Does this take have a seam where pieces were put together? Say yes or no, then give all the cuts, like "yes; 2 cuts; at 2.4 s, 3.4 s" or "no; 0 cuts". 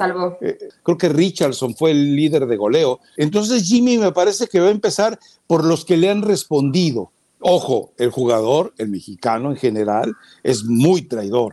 yes; 1 cut; at 3.1 s